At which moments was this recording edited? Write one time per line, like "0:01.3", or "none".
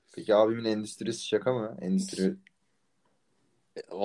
none